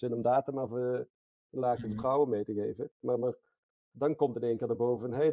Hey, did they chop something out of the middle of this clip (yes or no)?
no